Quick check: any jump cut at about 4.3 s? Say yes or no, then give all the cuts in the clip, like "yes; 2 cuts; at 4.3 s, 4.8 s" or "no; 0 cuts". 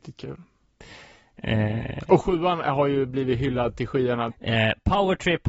yes; 1 cut; at 4.3 s